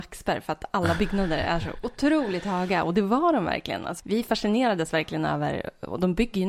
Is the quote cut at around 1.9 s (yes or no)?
no